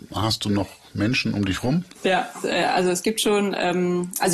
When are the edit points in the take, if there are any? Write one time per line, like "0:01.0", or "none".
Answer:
none